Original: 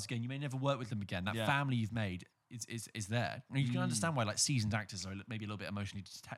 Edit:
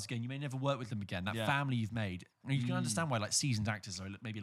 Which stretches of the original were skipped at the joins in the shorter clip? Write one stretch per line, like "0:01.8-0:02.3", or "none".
0:02.4-0:03.5